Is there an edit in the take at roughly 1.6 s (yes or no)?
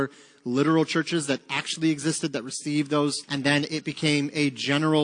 no